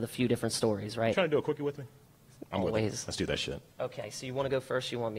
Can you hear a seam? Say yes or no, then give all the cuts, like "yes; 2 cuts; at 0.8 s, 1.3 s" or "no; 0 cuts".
yes; 2 cuts; at 2.4 s, 3.7 s